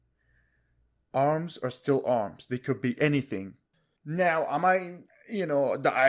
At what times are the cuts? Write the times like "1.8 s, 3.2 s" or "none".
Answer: none